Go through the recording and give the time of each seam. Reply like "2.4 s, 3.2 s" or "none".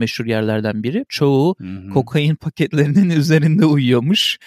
1.1 s